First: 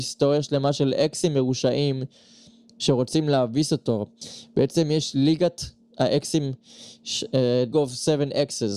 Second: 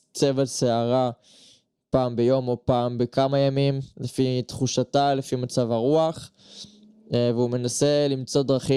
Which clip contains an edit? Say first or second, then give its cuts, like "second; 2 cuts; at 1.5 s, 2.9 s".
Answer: first; 1 cut; at 7.7 s